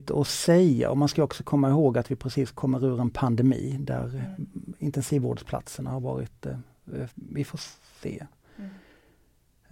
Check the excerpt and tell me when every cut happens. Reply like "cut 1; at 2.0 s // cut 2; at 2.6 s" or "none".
cut 1; at 7.1 s